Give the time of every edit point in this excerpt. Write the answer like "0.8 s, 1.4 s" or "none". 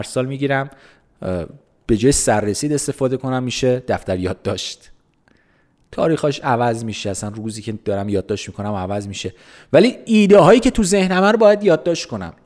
none